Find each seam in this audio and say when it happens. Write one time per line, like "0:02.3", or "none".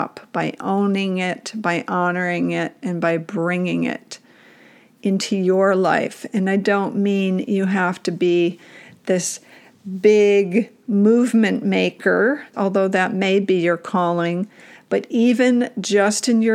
0:12.5